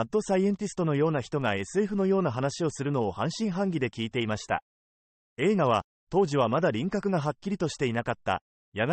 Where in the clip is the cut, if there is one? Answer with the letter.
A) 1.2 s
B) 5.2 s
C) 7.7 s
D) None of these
B